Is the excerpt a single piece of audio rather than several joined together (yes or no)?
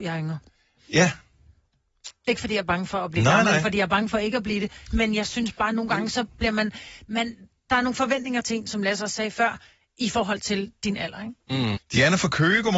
no